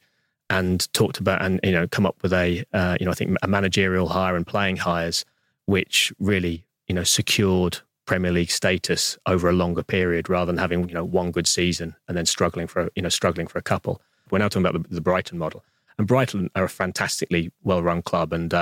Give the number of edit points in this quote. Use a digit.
1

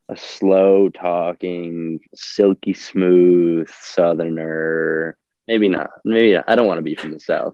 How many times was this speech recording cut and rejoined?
1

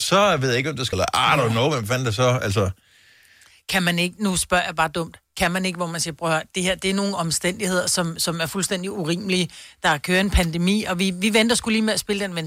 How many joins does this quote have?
1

